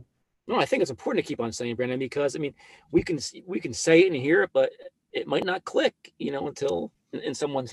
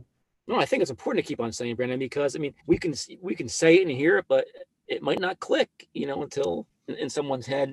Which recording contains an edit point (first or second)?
second